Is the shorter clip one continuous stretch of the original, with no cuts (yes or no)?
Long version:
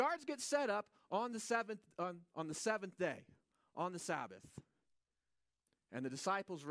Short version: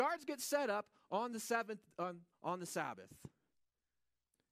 no